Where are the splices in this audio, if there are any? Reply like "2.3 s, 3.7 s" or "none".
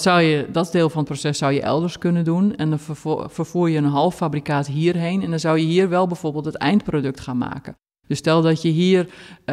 none